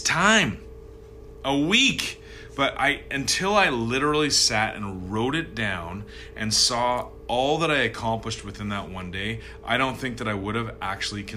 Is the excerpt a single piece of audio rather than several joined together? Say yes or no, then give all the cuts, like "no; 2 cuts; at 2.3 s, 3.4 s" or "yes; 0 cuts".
yes; 0 cuts